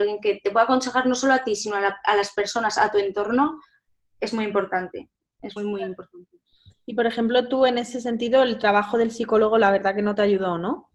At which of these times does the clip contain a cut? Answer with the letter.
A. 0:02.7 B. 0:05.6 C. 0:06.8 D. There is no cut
B